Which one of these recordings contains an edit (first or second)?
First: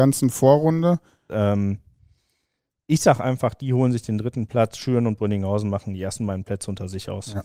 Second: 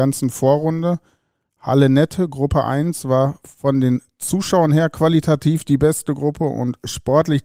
first